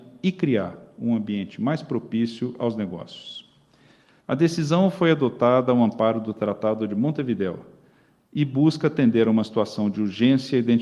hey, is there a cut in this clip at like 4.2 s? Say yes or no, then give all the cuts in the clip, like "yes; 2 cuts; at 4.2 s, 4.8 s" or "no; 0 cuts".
yes; 1 cut; at 4.2 s